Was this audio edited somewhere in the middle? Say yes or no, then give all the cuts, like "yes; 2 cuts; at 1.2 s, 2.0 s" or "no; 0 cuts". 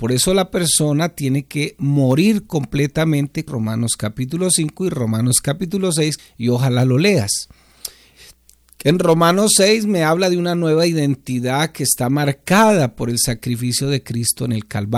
yes; 2 cuts; at 3.5 s, 6.2 s